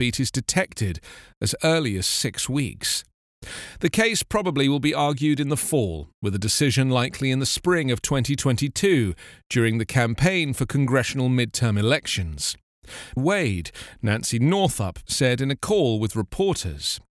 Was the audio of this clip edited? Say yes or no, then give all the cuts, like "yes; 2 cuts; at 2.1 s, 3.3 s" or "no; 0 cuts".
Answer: yes; 2 cuts; at 13.2 s, 15.1 s